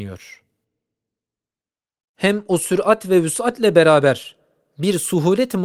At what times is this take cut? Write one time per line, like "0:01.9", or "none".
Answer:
none